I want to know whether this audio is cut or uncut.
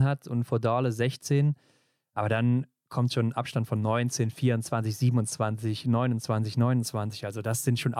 uncut